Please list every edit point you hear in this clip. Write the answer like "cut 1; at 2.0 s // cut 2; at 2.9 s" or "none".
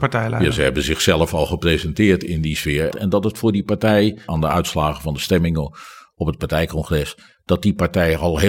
cut 1; at 2.9 s // cut 2; at 4.3 s